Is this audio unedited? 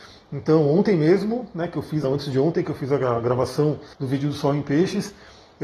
no; 2 cuts; at 2.0 s, 3.9 s

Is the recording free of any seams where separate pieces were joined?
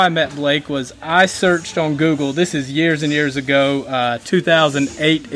yes; 0 cuts

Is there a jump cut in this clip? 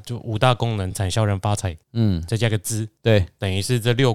no; 0 cuts

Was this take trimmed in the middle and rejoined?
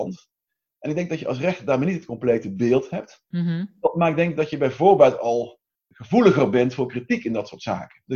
no; 0 cuts

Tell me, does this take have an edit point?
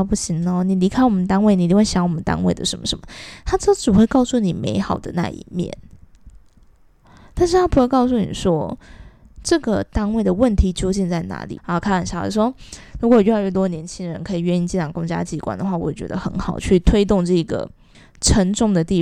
yes; 1 cut; at 11.6 s

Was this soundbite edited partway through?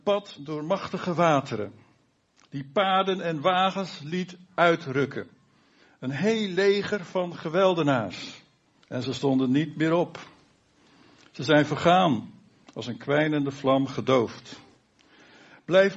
yes; 1 cut; at 8.8 s

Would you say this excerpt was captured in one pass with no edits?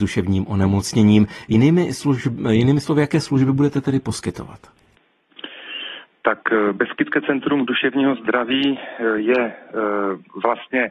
yes; 0 cuts

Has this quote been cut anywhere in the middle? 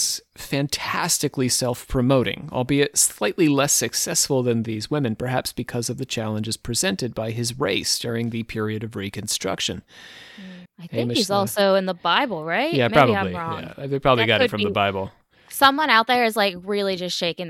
yes; 1 cut; at 10.7 s

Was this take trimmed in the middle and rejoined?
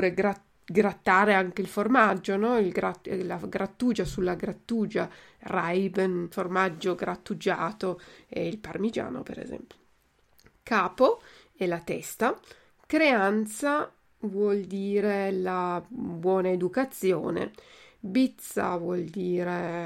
no; 0 cuts

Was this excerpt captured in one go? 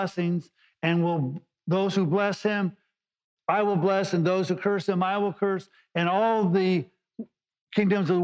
yes; 0 cuts

